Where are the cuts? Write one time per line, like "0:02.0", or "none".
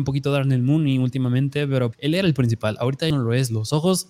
0:01.9